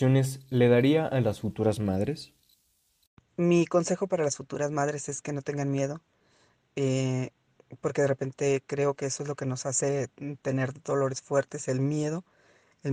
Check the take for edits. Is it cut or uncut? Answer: uncut